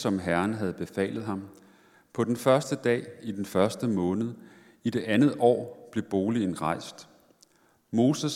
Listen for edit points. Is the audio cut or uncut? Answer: uncut